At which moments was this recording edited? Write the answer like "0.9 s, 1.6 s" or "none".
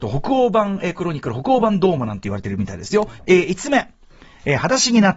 3.2 s